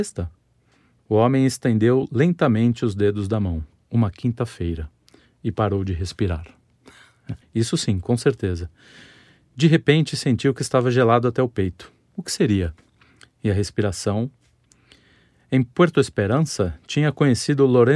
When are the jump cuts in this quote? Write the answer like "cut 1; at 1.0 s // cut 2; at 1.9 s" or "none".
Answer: cut 1; at 1.0 s // cut 2; at 7.4 s